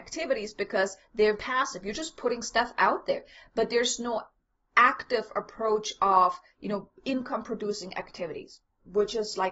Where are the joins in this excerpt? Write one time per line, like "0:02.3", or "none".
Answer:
0:01.3

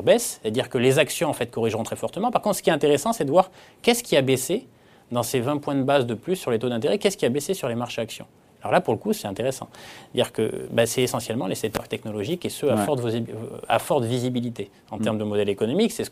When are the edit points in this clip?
none

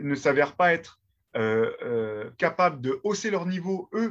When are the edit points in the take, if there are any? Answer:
none

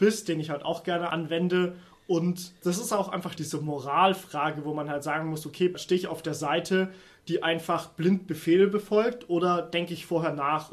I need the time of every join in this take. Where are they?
none

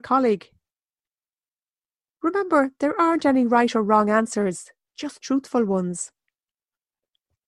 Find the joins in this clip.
none

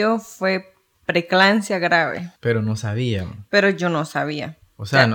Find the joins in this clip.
0:02.4

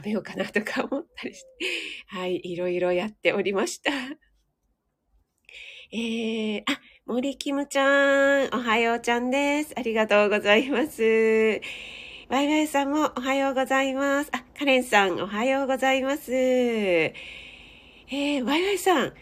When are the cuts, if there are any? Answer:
none

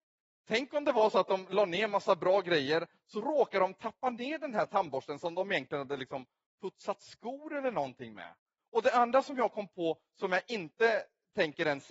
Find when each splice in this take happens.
0:08.6

